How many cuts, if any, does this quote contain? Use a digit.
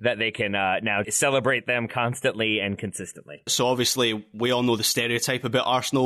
2